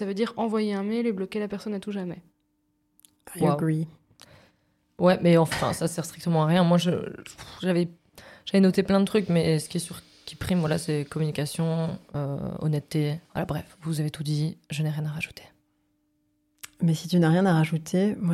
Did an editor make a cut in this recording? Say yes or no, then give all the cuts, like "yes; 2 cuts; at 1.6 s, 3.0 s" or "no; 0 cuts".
yes; 2 cuts; at 5.5 s, 13.2 s